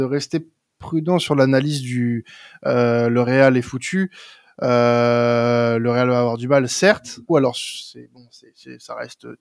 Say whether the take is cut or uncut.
cut